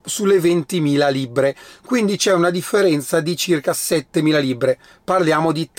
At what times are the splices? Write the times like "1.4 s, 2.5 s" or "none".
none